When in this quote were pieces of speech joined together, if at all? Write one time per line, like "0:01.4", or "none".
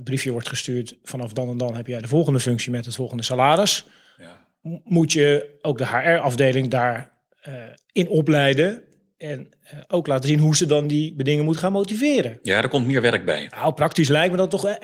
none